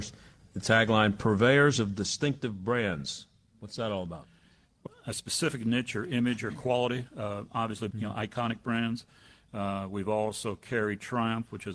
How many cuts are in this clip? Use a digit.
2